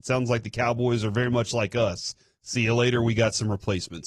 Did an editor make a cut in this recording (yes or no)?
no